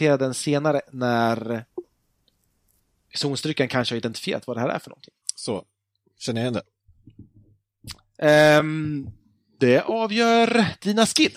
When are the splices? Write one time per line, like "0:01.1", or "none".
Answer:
none